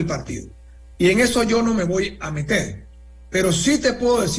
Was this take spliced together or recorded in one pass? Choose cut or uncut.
uncut